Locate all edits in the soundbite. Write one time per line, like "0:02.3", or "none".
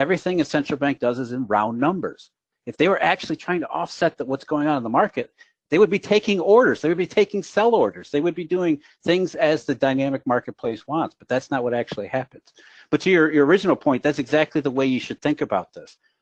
none